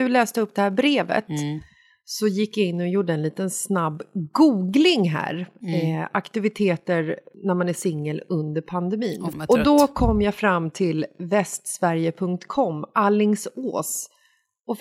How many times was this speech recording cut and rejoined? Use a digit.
1